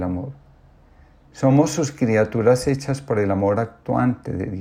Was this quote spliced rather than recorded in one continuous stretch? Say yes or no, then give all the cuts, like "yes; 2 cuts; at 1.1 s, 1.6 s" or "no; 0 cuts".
yes; 1 cut; at 1.3 s